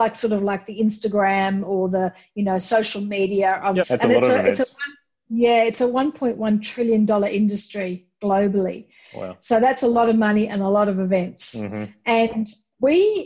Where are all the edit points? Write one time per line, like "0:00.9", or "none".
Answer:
0:03.8